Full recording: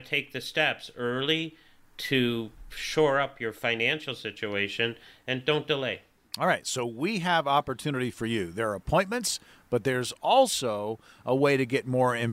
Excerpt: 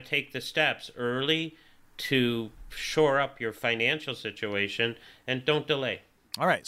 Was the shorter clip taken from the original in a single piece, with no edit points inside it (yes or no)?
yes